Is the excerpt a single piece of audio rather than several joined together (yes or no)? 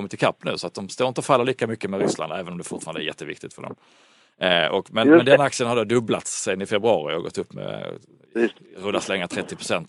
yes